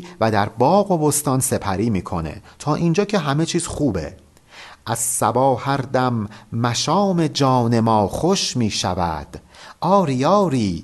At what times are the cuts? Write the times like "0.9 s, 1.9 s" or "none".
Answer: none